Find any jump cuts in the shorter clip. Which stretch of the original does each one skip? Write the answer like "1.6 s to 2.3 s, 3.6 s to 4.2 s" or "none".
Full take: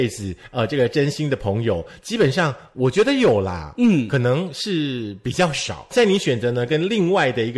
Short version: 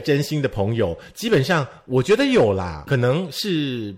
3.7 s to 4.1 s